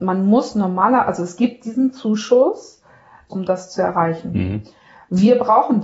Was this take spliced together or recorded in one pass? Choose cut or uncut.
cut